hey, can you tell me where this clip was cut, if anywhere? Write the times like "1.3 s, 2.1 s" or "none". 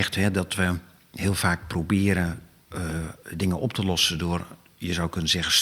none